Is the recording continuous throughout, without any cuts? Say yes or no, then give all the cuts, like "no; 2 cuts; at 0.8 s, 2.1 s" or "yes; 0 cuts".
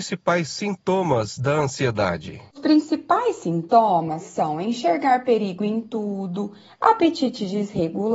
yes; 0 cuts